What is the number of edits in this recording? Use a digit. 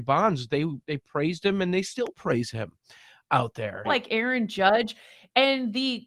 1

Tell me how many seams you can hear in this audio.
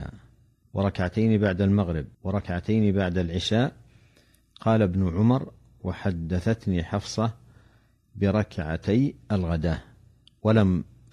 1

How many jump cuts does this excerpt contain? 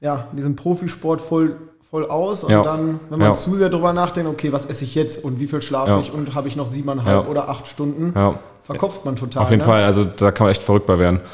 0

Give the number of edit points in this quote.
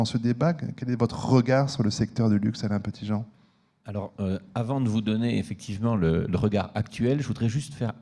0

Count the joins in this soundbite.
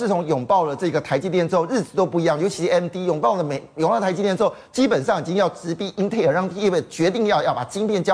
0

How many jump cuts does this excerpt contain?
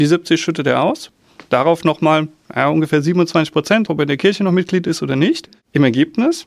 1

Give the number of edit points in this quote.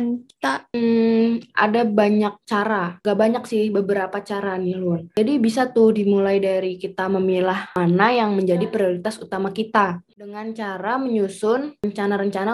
0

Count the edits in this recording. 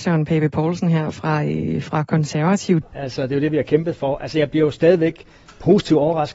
1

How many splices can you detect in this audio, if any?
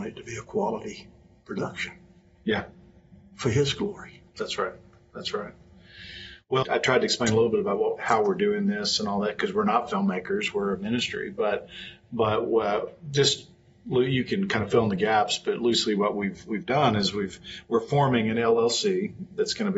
1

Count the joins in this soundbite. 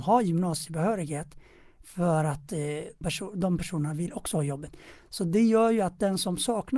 1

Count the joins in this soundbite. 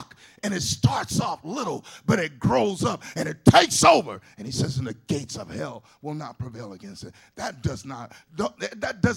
0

